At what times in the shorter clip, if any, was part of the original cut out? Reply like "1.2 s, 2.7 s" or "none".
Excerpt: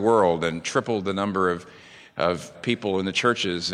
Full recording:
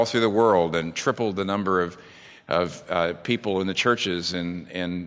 2.5 s

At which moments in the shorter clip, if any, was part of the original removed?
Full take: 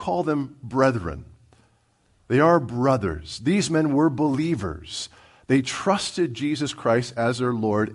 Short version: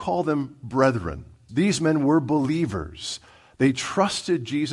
1.5 s

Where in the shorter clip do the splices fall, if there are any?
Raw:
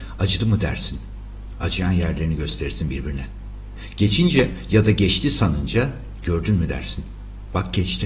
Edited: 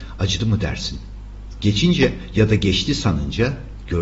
1.6 s

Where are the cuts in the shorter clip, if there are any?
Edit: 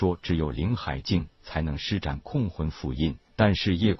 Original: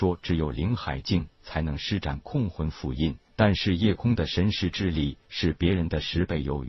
none

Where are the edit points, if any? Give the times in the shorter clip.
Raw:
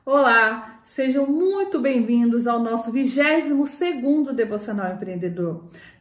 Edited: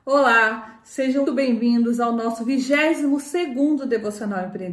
1.3 s

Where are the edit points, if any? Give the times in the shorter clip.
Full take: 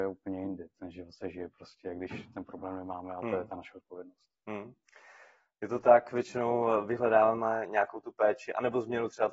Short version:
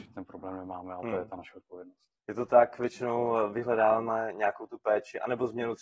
2.2 s

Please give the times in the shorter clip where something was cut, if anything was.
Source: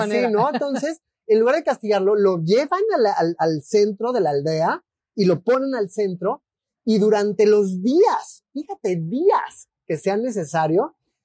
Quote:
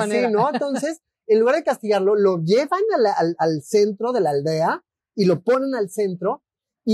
none

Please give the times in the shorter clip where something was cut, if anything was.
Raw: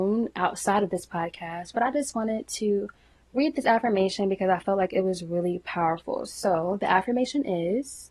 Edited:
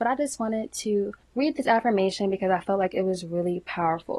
1.2 s

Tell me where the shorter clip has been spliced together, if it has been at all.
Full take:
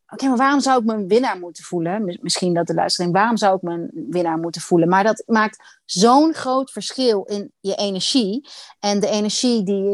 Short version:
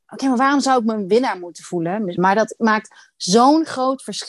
2.2 s

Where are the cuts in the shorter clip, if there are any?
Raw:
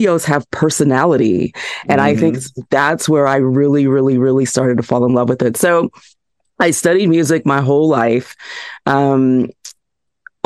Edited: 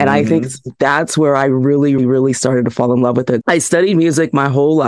2.0 s, 3.4 s

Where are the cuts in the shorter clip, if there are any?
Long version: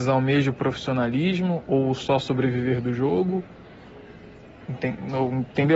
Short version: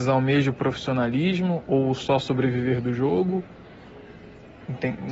none

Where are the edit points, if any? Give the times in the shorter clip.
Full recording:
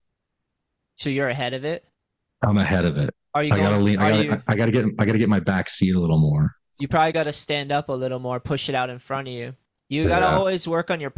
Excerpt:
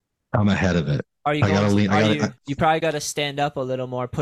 2.3 s

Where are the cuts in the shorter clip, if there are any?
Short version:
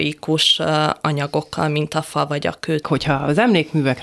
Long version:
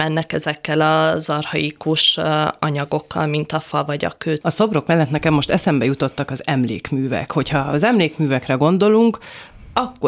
2.8 s

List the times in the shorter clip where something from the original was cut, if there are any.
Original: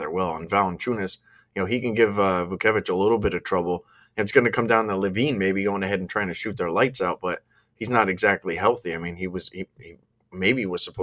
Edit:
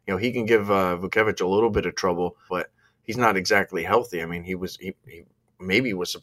2.5 s

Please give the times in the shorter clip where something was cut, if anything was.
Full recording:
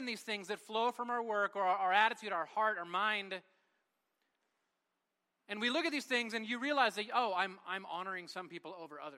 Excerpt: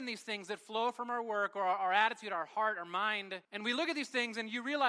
3.4 s

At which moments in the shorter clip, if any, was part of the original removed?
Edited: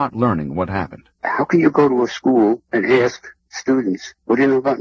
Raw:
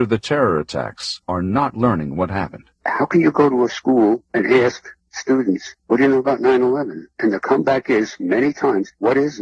none

